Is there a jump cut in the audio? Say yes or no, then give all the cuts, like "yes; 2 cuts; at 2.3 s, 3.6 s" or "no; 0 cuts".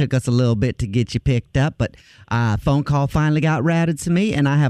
no; 0 cuts